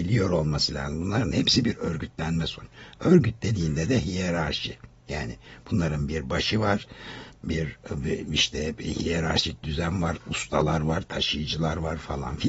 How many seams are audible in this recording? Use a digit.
0